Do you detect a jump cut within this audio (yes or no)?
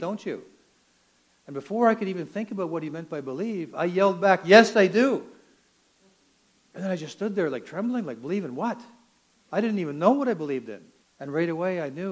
yes